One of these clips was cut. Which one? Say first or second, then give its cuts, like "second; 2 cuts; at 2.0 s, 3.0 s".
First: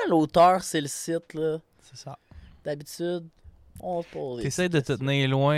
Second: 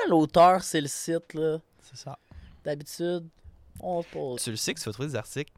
second; 1 cut; at 4.4 s